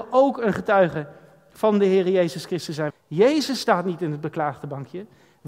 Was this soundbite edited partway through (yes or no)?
yes